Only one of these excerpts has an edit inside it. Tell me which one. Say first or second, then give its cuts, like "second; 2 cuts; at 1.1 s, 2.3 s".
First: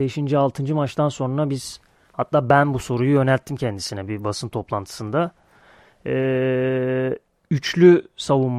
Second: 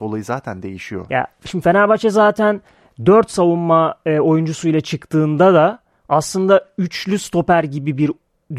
second; 1 cut; at 1.1 s